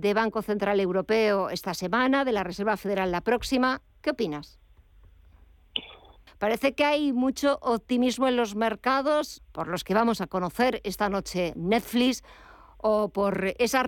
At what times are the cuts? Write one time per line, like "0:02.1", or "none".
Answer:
0:06.3
0:09.4

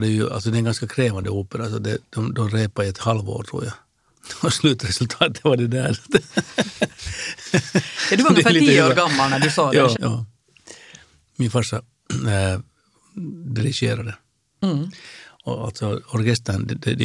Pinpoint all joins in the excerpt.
0:09.9

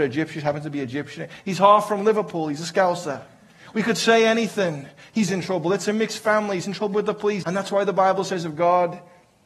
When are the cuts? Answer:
0:05.3
0:07.4

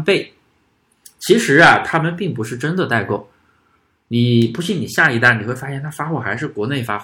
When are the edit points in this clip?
none

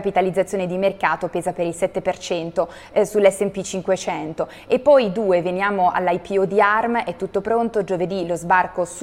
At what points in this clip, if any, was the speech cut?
none

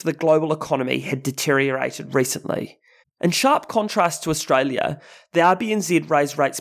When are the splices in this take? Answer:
0:03.0

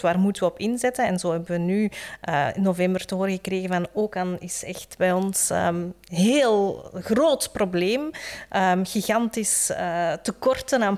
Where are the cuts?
none

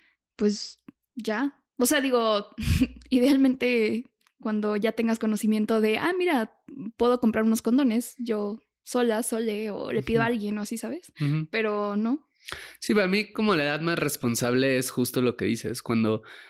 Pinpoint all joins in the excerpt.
none

